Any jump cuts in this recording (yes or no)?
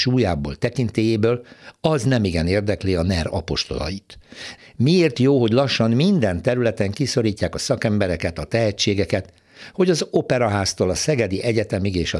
yes